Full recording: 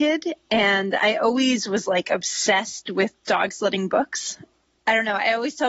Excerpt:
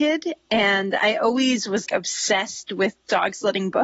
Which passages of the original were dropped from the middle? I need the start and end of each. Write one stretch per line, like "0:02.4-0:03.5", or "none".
0:01.9-0:02.0